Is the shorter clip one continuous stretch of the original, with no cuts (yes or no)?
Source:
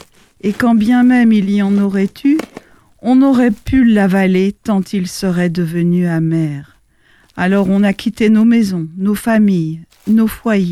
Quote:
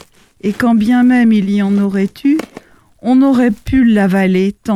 yes